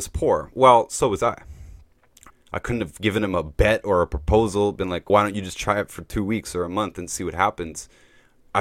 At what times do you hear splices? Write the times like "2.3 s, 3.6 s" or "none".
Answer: 2.3 s, 5.1 s